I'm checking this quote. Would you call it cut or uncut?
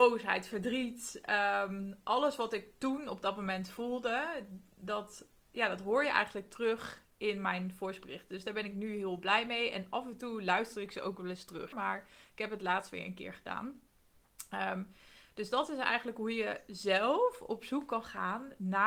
cut